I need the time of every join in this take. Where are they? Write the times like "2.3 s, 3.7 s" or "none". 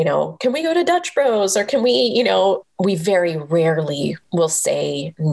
2.6 s